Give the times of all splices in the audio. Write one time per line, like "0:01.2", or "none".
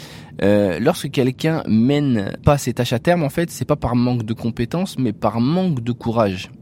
0:02.4